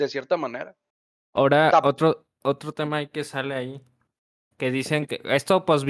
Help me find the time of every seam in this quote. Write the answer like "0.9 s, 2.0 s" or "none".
none